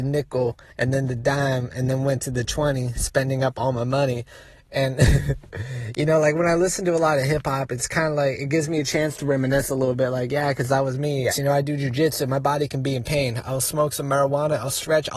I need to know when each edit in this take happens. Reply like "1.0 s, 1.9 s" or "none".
11.3 s

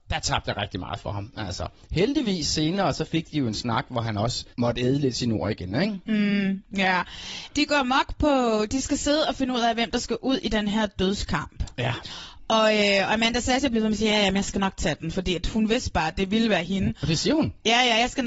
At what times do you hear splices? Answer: 4.5 s

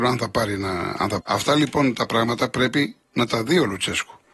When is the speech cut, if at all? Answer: 1.2 s

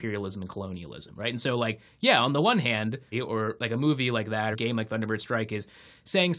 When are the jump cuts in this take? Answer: 3.1 s, 4.5 s

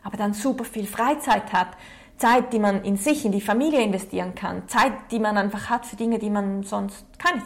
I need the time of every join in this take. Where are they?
none

